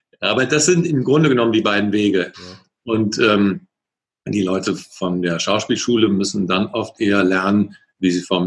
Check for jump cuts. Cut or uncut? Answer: cut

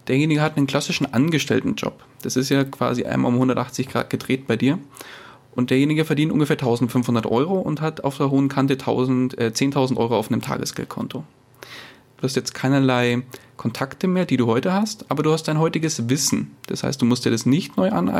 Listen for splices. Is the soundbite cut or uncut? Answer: uncut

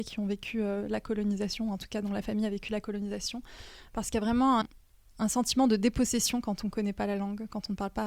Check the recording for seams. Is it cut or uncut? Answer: cut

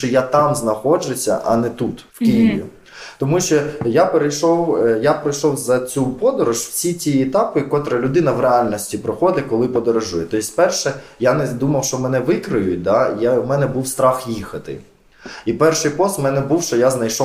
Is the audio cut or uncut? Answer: cut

